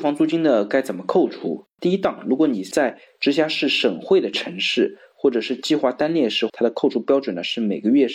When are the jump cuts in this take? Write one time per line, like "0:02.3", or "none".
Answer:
0:01.8
0:06.5